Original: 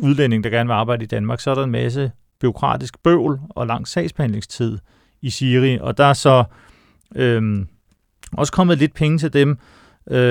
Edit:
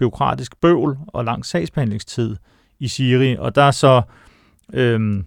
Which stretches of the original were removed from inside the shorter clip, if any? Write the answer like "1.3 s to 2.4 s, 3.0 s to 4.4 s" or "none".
none